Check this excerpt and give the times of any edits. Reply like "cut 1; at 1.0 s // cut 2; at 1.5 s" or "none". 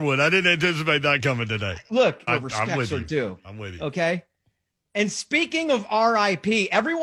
cut 1; at 2.3 s